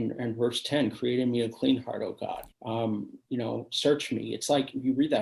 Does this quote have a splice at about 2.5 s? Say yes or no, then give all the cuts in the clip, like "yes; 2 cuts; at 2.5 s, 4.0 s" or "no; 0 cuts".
yes; 1 cut; at 2.5 s